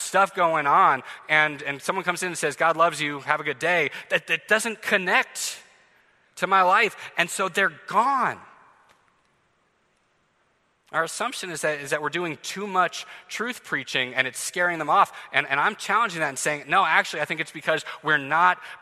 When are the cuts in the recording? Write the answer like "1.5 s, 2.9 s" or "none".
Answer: none